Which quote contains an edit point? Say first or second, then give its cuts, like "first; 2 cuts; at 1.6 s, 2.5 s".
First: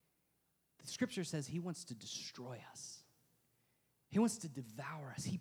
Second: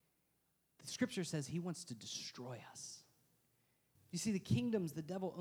second; 1 cut; at 4.0 s